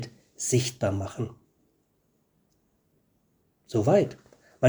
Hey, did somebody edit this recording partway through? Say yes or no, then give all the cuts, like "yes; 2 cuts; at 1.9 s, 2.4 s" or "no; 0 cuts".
no; 0 cuts